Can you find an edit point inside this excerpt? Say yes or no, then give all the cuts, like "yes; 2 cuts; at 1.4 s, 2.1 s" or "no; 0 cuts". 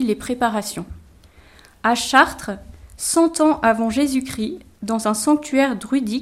no; 0 cuts